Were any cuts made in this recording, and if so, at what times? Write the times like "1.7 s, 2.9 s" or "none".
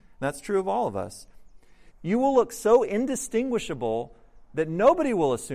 1.9 s